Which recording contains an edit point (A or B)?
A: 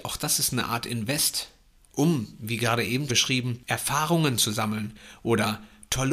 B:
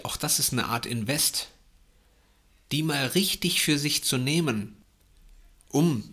A